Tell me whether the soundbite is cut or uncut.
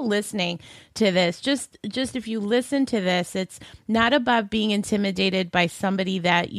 uncut